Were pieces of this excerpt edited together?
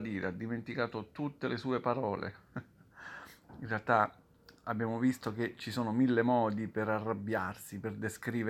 yes; 1 cut; at 2.9 s

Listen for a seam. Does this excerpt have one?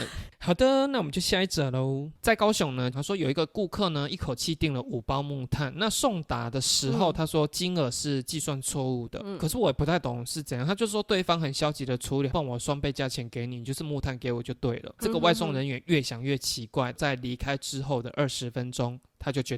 yes; 2 cuts; at 2.9 s, 12.3 s

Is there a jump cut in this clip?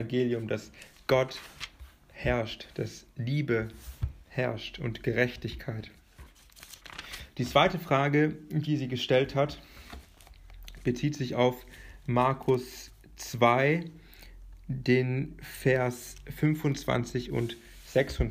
no; 0 cuts

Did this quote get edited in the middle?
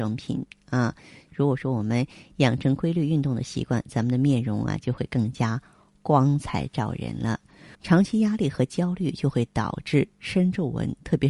yes; 2 cuts; at 1.3 s, 7.8 s

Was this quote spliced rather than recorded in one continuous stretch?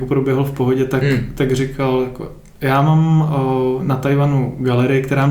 no; 0 cuts

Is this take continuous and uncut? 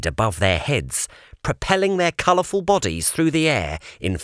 yes; 0 cuts

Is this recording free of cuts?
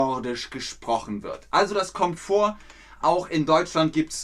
yes; 0 cuts

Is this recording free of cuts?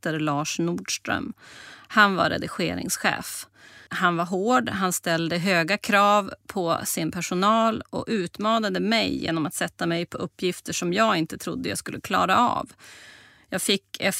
no; 1 cut; at 3.9 s

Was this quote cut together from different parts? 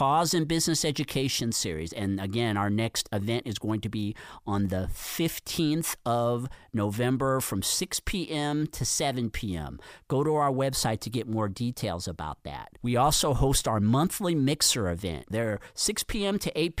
yes; 2 cuts; at 12.8 s, 15.3 s

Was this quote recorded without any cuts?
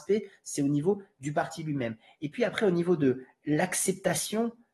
yes; 0 cuts

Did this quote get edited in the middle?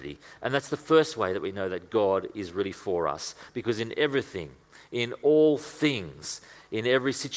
no; 0 cuts

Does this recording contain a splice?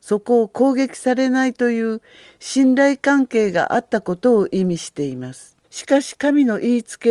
yes; 1 cut; at 5.6 s

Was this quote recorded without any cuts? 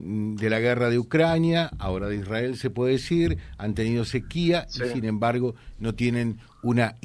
yes; 0 cuts

